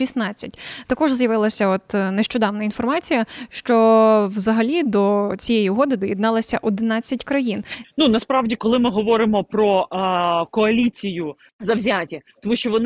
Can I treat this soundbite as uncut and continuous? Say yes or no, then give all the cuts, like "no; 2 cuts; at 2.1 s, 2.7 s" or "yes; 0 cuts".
no; 2 cuts; at 7.8 s, 11.5 s